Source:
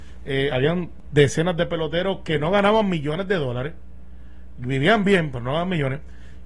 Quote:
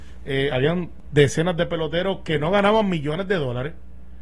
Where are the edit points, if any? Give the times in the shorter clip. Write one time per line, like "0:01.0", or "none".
none